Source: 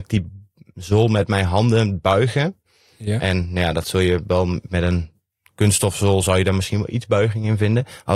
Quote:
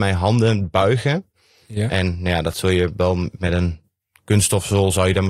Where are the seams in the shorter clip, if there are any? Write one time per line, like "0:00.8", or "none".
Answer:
none